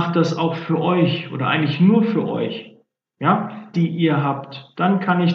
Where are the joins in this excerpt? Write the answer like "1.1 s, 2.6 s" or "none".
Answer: 3.7 s